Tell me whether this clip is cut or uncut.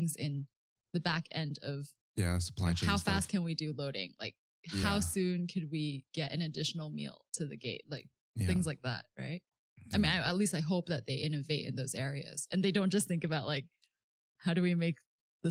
uncut